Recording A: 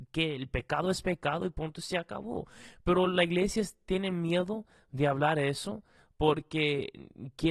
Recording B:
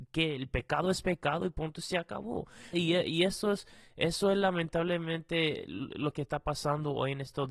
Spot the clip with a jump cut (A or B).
B